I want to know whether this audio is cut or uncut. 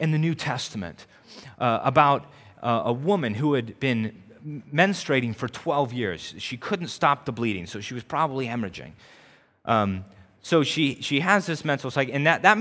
uncut